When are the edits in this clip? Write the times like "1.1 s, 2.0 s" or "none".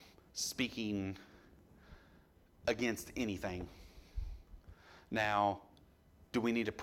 none

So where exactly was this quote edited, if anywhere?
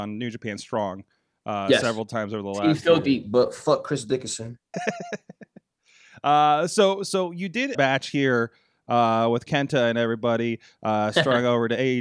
4.7 s, 7.7 s

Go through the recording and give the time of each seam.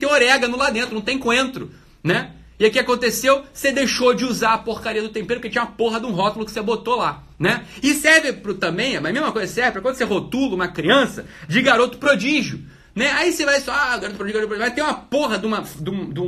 none

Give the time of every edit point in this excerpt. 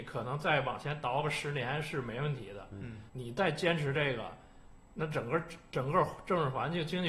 3.1 s

